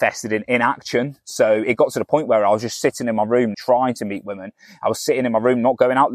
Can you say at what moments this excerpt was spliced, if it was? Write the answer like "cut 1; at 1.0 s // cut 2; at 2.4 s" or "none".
cut 1; at 3.5 s